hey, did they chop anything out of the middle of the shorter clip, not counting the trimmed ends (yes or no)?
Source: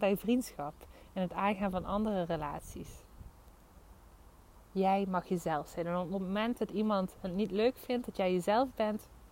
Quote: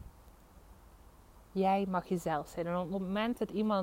no